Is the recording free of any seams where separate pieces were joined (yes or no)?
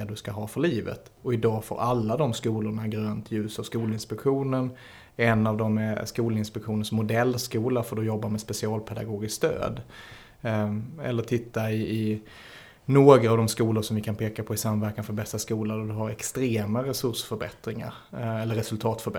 yes